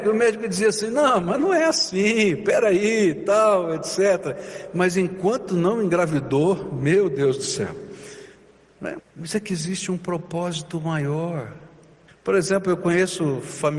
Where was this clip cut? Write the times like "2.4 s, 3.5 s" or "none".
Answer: 9.0 s, 12.1 s